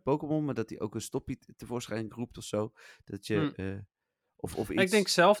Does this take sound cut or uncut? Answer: uncut